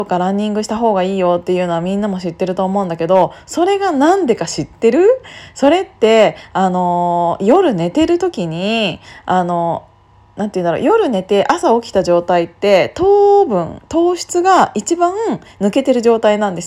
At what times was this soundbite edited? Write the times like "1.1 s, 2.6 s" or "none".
none